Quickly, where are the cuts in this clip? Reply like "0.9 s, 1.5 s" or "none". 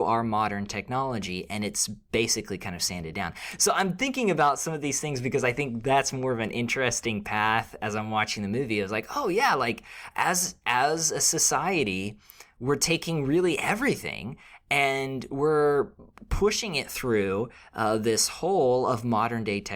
none